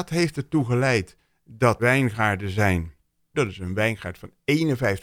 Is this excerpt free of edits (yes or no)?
no